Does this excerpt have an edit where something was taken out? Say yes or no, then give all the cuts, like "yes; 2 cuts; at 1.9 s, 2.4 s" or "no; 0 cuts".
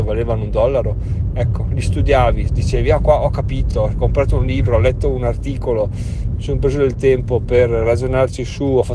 no; 0 cuts